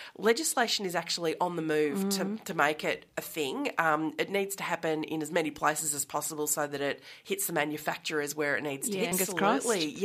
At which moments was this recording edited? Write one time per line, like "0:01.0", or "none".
0:09.1